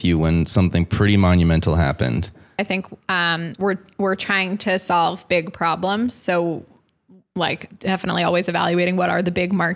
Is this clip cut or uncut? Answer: cut